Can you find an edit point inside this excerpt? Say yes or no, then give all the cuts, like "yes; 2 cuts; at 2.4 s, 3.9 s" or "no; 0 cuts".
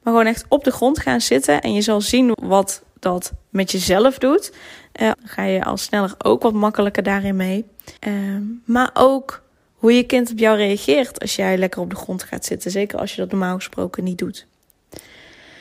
yes; 3 cuts; at 2.3 s, 5.1 s, 8.0 s